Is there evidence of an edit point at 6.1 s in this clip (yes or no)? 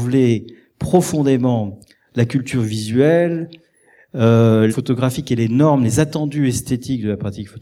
no